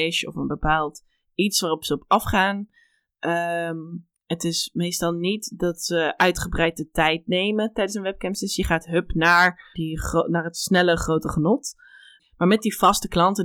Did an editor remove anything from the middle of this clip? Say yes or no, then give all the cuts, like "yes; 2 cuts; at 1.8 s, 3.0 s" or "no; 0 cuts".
yes; 2 cuts; at 9.7 s, 12.2 s